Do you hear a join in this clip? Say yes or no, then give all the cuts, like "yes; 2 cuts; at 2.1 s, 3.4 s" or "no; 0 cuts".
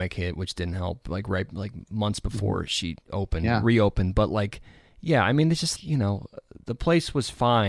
yes; 1 cut; at 5.8 s